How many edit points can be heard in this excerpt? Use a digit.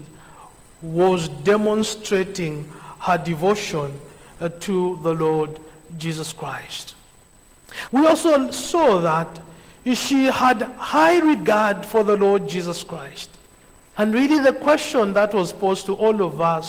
2